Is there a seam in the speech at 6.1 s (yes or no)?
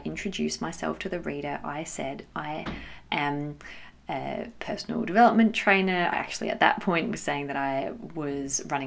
no